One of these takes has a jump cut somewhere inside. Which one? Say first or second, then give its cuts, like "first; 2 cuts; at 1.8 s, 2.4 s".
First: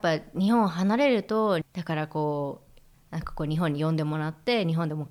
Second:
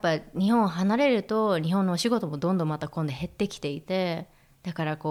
first; 2 cuts; at 1.6 s, 2.9 s